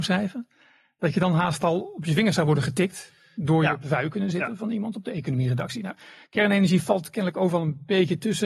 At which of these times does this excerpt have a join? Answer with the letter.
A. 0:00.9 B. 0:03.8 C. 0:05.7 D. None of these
B